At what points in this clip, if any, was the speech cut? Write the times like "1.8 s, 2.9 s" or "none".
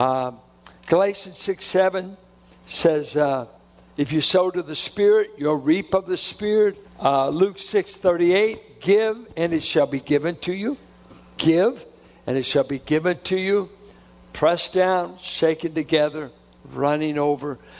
6.8 s